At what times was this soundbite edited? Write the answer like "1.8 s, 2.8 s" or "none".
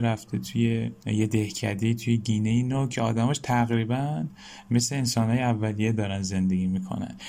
1.0 s